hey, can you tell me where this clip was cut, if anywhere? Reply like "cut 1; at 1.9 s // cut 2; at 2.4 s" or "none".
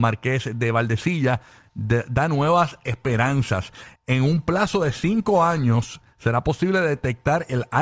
cut 1; at 3.9 s